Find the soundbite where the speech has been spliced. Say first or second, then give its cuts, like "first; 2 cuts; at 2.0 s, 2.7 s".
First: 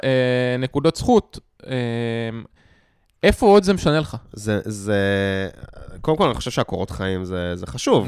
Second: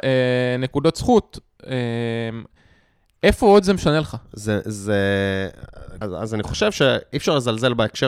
second; 1 cut; at 6.0 s